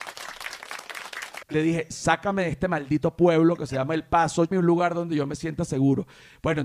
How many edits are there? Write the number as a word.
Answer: two